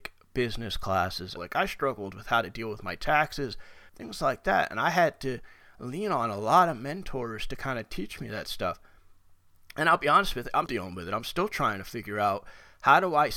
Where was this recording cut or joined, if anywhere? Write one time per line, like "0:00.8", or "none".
0:01.4
0:03.9
0:10.7